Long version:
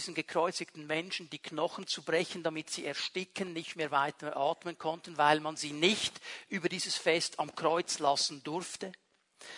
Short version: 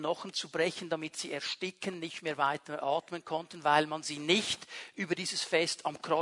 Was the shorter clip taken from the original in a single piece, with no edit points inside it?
yes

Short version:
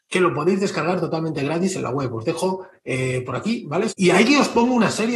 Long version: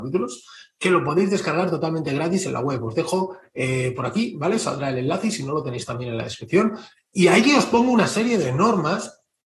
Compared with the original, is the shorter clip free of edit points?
no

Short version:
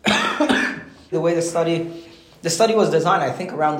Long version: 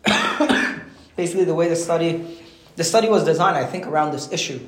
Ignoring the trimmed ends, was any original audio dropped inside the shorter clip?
yes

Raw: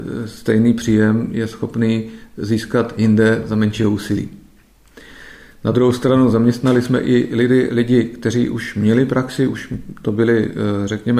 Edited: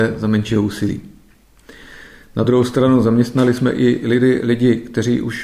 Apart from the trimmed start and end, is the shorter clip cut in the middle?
no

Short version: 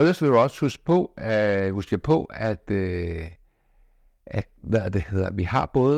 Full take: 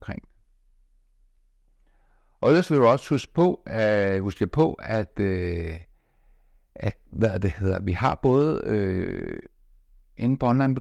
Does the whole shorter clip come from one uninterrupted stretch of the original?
yes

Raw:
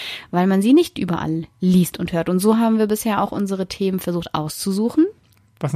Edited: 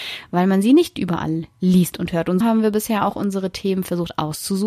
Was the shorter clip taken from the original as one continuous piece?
no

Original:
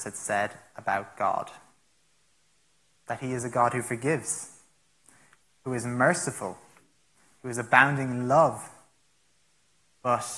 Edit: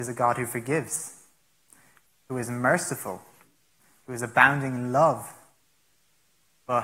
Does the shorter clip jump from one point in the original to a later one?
no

